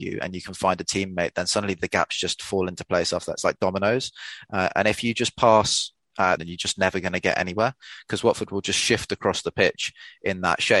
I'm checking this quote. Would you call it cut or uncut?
cut